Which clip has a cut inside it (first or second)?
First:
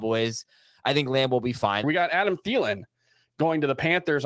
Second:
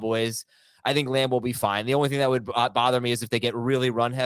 first